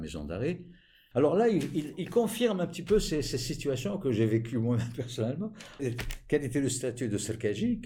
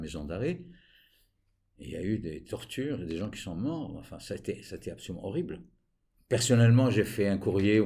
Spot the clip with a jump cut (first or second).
first